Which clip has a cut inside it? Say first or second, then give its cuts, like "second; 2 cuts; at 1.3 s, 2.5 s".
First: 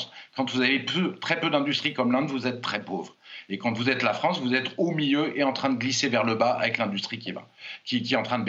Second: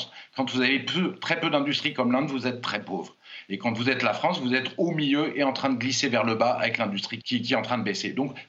second; 1 cut; at 7.2 s